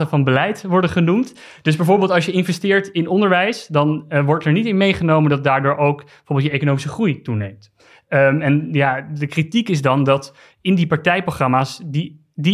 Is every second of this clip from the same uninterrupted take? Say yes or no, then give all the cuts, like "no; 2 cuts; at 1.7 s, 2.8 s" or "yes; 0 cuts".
yes; 0 cuts